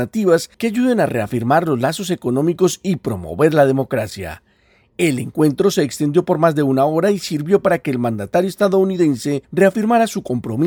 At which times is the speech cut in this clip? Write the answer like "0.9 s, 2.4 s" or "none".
none